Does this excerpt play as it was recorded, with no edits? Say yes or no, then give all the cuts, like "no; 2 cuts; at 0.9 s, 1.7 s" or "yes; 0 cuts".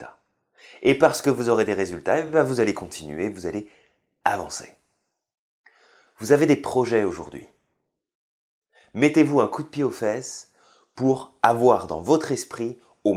yes; 0 cuts